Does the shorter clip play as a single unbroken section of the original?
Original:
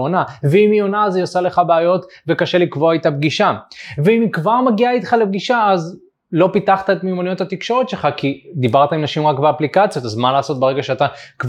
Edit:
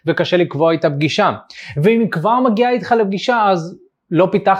yes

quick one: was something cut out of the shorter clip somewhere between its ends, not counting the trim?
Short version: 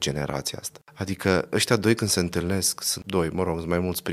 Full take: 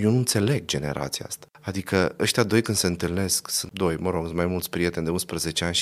no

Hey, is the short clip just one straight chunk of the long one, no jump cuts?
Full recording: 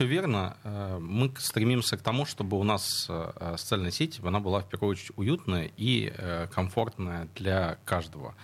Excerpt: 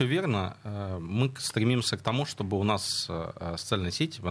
yes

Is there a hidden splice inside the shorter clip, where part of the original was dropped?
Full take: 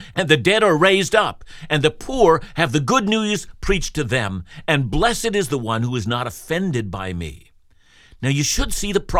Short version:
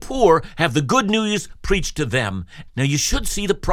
yes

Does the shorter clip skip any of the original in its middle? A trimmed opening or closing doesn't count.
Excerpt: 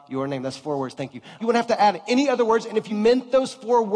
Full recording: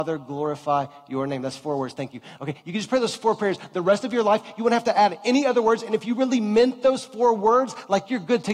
yes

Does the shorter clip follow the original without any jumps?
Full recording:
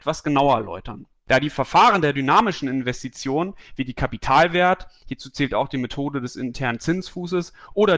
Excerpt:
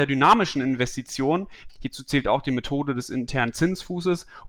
no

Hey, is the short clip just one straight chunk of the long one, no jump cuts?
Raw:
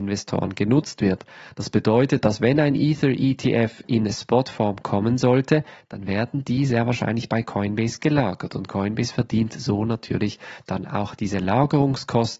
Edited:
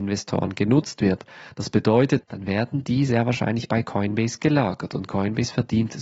no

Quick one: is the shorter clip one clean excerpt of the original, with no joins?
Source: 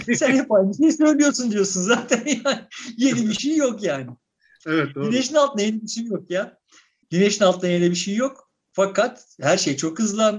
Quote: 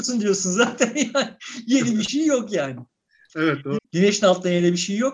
no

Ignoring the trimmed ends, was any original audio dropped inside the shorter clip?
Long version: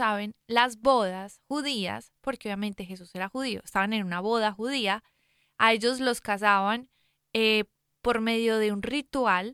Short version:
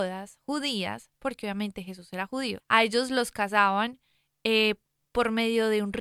yes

